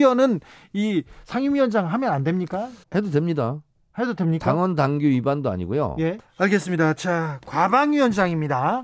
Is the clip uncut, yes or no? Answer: no